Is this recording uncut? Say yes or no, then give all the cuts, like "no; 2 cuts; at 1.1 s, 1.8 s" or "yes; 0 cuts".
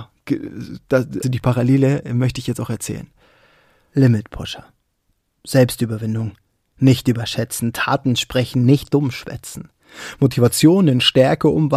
no; 1 cut; at 1.2 s